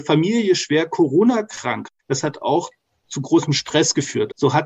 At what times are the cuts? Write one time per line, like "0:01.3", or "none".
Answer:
none